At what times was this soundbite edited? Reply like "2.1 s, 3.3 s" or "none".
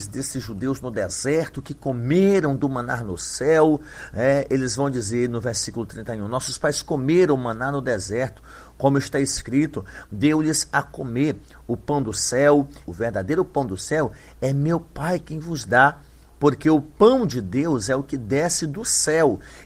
12.8 s